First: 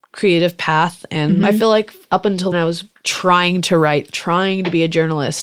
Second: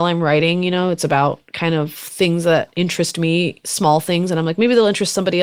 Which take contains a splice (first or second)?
first